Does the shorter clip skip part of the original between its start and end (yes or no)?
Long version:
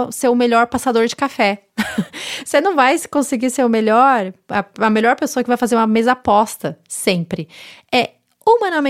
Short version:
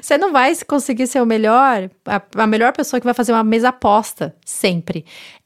no